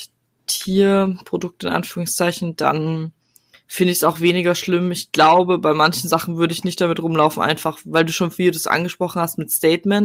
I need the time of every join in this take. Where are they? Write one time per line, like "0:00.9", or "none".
none